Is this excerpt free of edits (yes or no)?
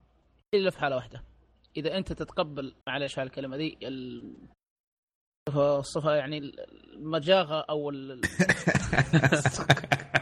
no